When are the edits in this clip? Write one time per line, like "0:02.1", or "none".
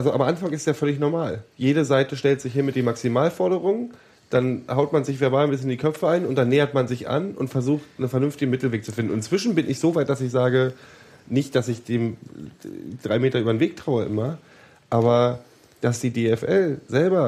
none